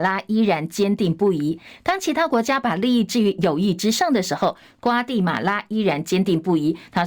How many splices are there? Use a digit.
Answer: 0